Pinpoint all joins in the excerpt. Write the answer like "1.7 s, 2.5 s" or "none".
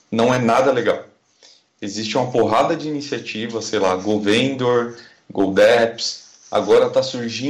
none